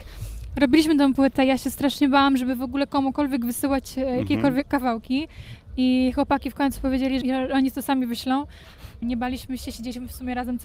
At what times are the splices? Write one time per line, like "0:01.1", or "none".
0:07.2
0:09.0